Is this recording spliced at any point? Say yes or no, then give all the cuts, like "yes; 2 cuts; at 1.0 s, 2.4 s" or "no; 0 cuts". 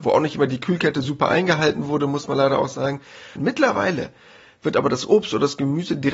yes; 1 cut; at 3.4 s